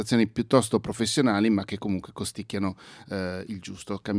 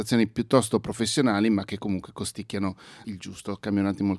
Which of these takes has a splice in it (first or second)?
second